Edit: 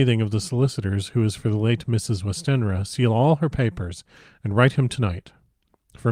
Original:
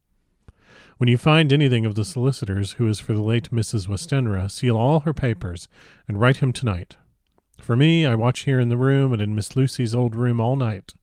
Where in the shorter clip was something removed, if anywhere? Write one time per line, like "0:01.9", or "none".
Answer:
none